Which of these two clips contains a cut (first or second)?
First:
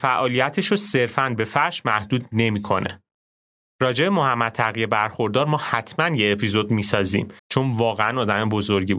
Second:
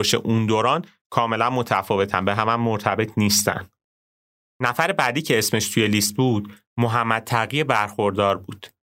first